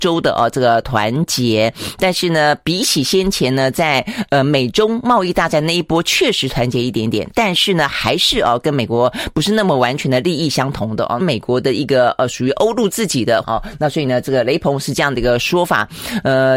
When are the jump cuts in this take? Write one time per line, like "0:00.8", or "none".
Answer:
0:11.2
0:13.4